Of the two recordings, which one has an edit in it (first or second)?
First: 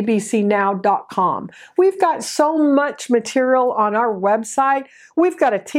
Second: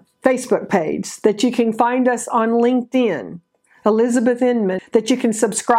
second